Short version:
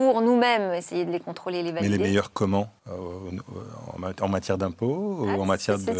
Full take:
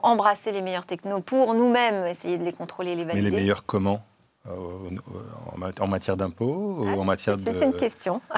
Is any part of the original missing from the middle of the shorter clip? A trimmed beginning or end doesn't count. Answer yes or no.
yes